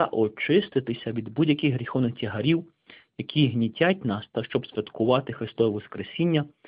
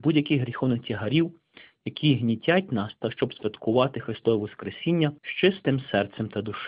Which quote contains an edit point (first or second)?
second